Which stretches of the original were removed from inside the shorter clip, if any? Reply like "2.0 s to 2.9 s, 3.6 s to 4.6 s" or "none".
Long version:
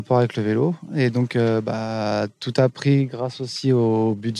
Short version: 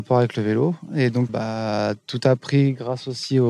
1.3 s to 1.6 s